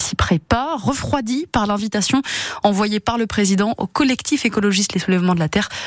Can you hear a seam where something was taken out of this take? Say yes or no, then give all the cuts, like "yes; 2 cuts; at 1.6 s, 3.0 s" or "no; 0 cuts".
no; 0 cuts